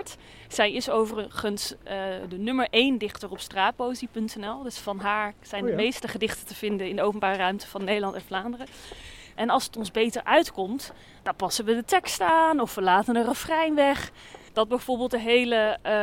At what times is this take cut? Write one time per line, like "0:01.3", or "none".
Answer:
0:09.4
0:14.5